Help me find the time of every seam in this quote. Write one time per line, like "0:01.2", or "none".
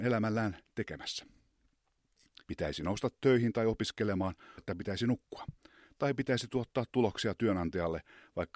0:02.4
0:04.6